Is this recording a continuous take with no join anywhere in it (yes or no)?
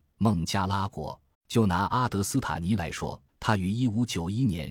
no